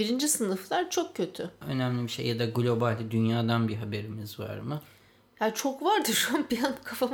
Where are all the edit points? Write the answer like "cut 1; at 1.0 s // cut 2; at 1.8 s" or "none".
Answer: cut 1; at 1.6 s